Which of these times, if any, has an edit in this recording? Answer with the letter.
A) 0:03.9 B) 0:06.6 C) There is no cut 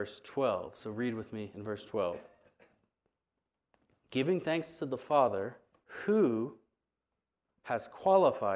C